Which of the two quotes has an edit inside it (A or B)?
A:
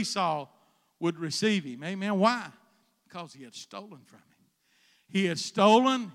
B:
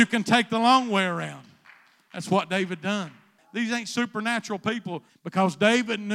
B